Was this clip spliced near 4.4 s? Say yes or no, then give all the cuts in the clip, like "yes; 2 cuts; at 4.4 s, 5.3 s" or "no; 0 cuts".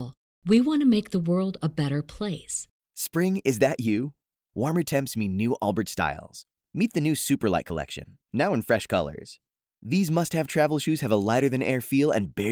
no; 2 cuts; at 2.7 s, 8.3 s